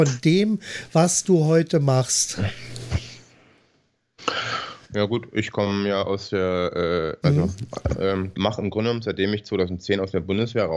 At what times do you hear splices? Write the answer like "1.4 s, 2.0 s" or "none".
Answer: 7.2 s, 8.3 s